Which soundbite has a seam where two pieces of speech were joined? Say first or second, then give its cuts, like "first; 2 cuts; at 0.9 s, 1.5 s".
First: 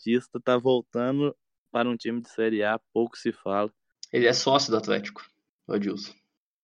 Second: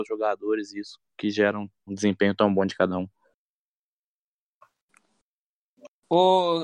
second; 1 cut; at 1.9 s